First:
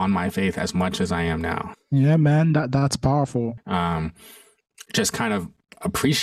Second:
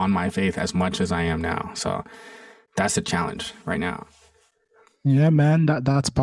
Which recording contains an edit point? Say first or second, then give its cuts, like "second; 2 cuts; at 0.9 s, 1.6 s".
first; 2 cuts; at 1.7 s, 3.6 s